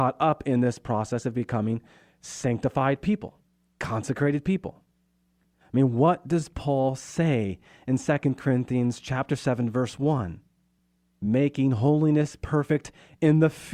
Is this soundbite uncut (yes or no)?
yes